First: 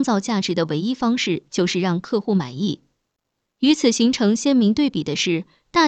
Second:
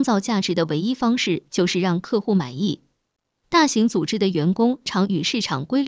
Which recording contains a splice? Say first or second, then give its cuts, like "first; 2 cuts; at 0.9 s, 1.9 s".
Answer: second; 2 cuts; at 3.4 s, 4.9 s